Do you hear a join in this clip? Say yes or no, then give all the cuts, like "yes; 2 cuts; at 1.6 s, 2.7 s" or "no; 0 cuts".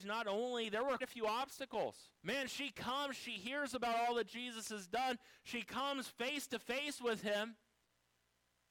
yes; 2 cuts; at 1.0 s, 2.2 s